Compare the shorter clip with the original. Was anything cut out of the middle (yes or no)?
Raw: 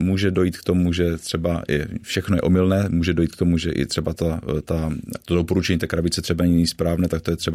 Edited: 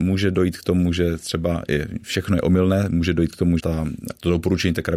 yes